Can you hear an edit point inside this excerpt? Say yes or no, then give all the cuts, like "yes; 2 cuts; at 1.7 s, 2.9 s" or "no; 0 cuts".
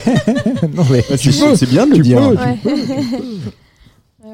no; 0 cuts